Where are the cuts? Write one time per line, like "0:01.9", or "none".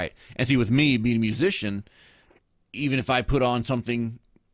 none